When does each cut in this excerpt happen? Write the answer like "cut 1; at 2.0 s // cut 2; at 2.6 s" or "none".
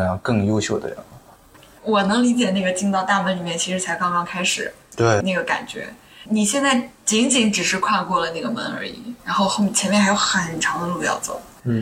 cut 1; at 5.2 s // cut 2; at 9.2 s